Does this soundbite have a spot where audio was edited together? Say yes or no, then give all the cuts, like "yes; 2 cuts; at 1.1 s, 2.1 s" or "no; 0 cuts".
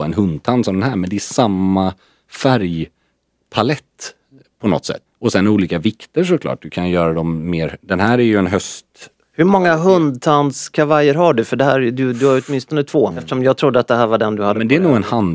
yes; 2 cuts; at 5.1 s, 13.1 s